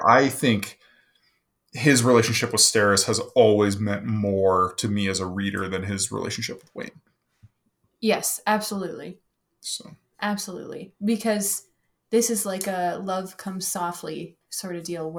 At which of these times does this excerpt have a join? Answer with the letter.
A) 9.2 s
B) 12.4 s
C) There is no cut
C